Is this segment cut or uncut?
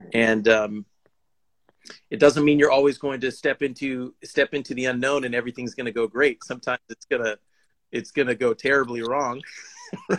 uncut